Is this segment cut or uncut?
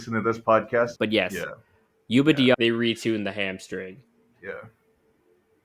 cut